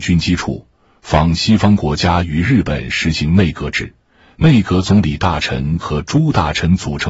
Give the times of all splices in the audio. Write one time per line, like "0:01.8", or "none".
none

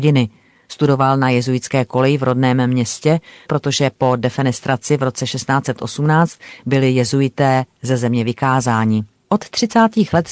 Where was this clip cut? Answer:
0:03.5

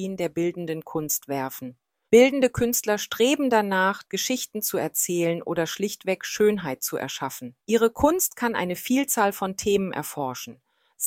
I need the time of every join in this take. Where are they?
0:02.1
0:04.0
0:07.6

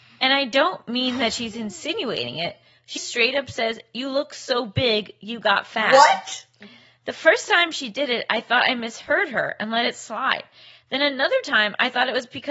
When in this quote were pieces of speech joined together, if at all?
0:03.0

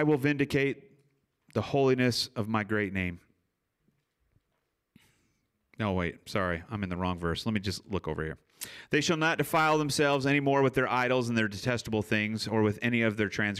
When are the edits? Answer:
none

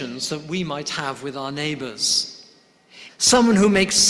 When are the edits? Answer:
0:03.1

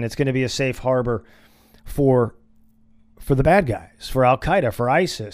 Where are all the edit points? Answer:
none

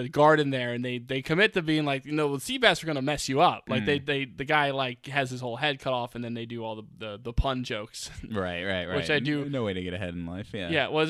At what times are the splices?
none

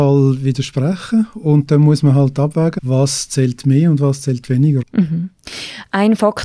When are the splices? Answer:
0:02.8
0:04.8

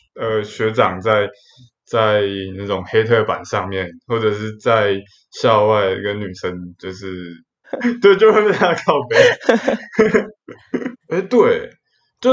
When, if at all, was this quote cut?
0:07.6
0:10.9

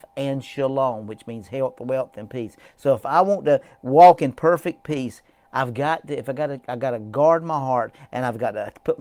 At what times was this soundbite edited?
none

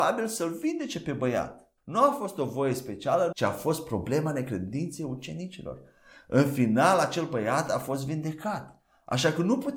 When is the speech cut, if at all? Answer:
0:01.8
0:03.3

